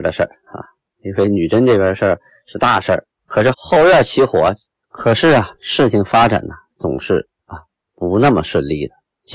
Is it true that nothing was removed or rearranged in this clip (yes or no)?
no